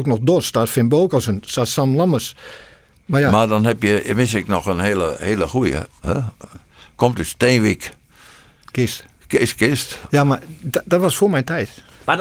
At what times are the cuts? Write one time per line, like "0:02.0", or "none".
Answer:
0:06.0

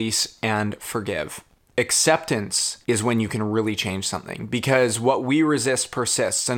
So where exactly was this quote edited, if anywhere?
0:02.8

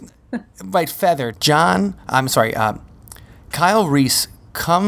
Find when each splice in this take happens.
0:01.3

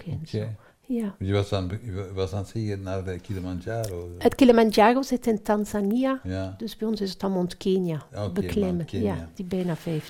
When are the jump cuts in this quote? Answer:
none

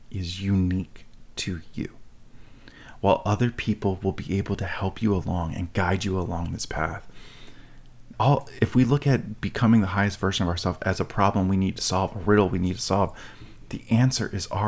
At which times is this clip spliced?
0:08.1

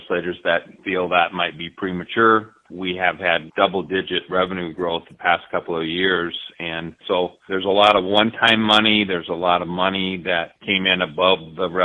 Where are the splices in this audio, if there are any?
0:03.5

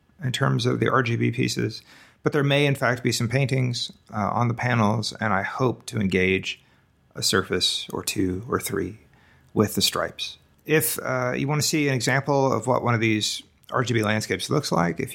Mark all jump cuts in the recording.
0:10.5

